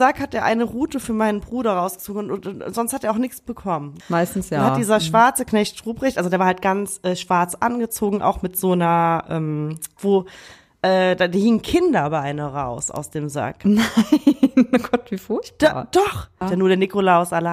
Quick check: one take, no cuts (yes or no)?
no